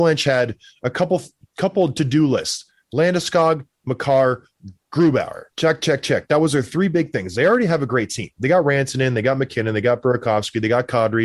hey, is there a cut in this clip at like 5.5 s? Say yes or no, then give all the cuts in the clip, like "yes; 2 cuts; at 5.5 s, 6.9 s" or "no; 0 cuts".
yes; 1 cut; at 5.5 s